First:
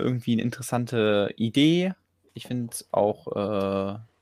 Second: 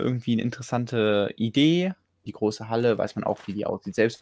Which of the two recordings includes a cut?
second; 1 cut; at 2.3 s

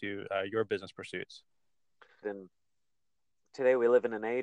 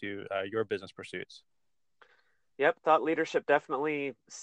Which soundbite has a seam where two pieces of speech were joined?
first; 1 cut; at 2.2 s

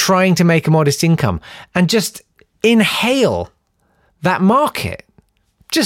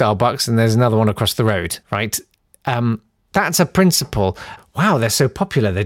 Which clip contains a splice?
second; 3 cuts; at 1.8 s, 3.2 s, 4.6 s

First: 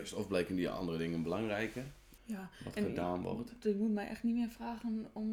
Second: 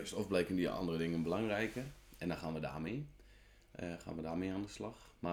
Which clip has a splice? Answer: first; 1 cut; at 2.2 s

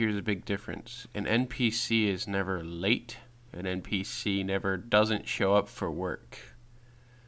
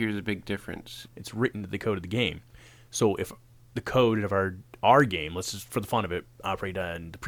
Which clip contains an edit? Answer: second; 1 cut; at 1.1 s

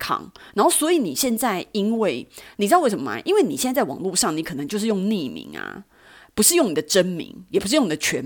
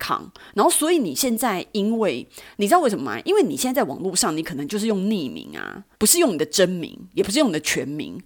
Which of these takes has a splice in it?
second; 1 cut; at 5.9 s

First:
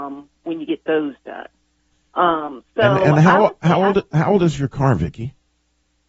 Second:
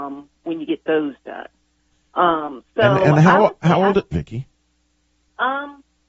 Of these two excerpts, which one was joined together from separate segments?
second; 1 cut; at 4.1 s

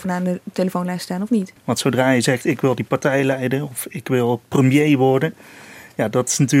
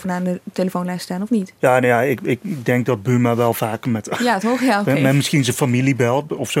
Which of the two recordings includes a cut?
first; 1 cut; at 1.6 s

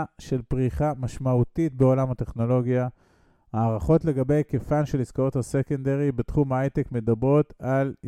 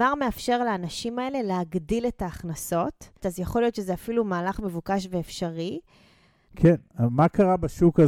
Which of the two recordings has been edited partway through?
second; 2 cuts; at 3.2 s, 6.5 s

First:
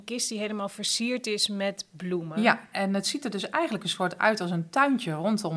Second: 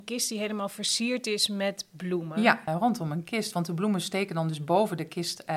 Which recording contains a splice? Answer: second; 1 cut; at 2.7 s

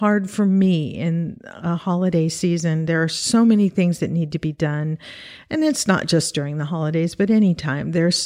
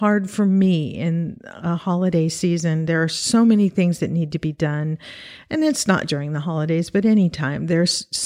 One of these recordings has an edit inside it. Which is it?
second; 1 cut; at 6.1 s

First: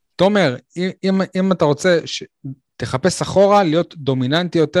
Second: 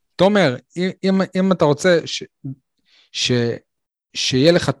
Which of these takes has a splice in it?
first; 1 cut; at 2.7 s

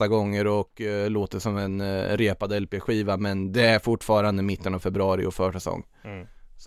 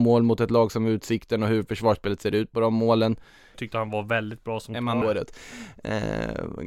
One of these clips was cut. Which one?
second; 2 cuts; at 3.5 s, 5.0 s

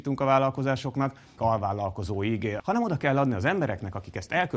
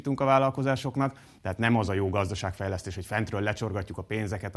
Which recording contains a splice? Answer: first; 2 cuts; at 1.4 s, 2.6 s

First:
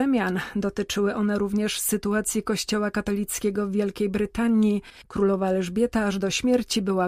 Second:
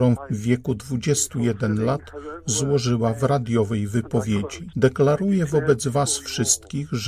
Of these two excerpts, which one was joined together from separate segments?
first; 1 cut; at 5.0 s

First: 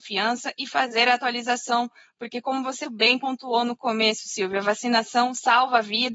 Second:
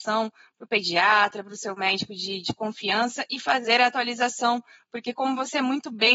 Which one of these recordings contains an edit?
first; 1 cut; at 2.8 s

